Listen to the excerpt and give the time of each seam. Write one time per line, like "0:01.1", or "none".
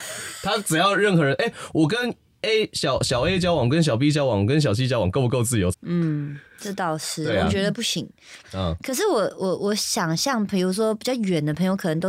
0:05.7
0:08.4